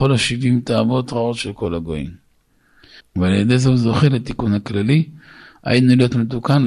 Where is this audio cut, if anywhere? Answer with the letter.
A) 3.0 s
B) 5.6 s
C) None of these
A